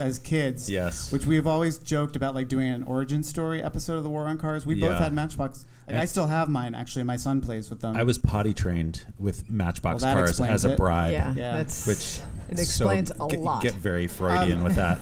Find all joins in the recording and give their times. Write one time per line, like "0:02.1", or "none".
none